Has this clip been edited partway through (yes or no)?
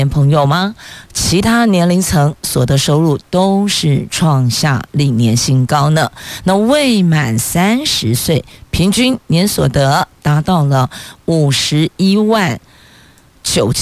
yes